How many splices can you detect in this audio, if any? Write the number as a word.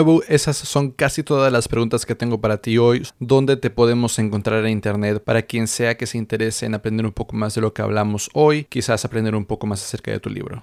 one